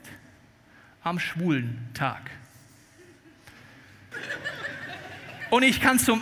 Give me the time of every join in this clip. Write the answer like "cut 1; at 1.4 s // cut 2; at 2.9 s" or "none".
cut 1; at 4.1 s